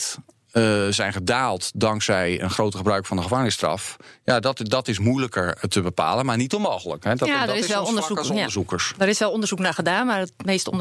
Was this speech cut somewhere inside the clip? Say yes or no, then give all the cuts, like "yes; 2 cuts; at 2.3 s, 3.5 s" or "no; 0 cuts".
no; 0 cuts